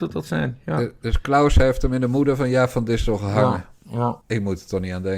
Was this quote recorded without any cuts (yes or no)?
no